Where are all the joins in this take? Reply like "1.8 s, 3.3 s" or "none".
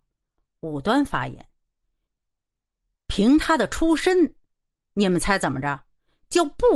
none